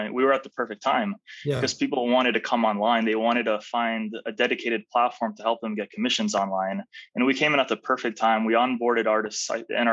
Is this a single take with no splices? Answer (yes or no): yes